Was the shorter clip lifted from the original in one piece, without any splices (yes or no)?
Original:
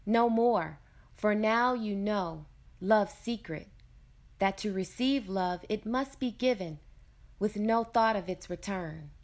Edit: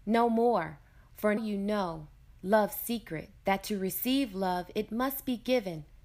no